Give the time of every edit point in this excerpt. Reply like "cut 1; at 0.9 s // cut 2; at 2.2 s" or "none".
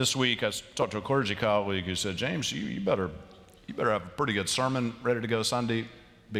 none